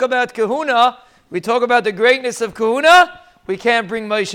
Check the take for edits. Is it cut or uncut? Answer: uncut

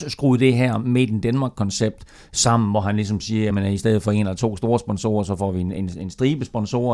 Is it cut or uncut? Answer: uncut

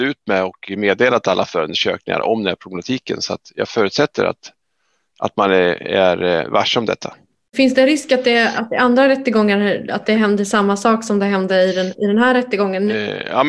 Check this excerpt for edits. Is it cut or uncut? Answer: uncut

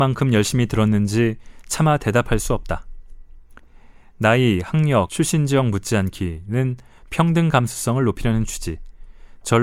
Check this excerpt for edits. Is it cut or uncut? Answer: cut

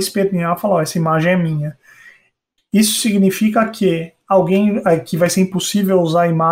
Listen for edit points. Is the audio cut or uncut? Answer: cut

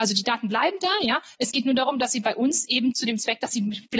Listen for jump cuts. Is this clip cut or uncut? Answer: uncut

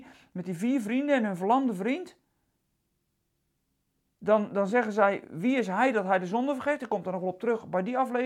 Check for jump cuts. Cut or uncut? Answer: uncut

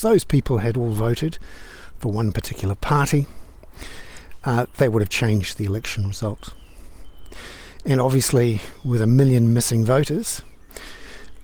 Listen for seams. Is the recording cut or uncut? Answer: uncut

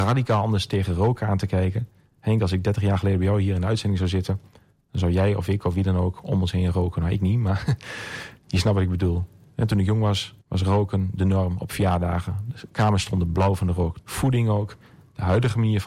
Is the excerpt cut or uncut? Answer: cut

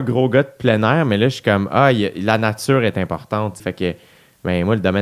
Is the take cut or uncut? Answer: cut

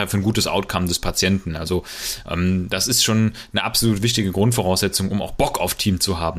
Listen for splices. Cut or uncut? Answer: uncut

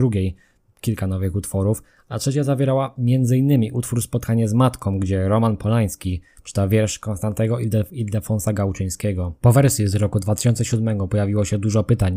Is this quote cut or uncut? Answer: uncut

